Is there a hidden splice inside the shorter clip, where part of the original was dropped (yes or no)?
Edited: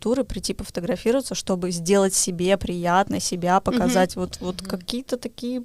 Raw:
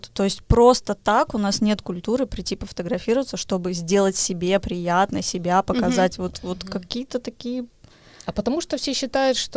no